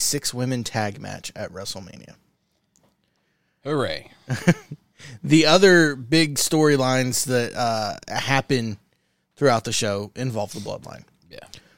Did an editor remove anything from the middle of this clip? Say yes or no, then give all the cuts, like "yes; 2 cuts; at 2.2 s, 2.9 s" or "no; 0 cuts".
no; 0 cuts